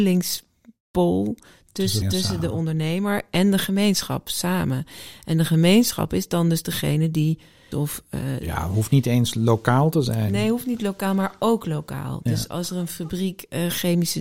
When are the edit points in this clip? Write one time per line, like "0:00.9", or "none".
0:02.0
0:07.7